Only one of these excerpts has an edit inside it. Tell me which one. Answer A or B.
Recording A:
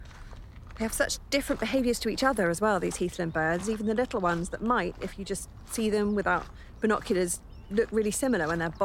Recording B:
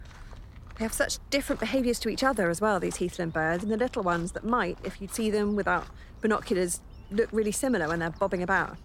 B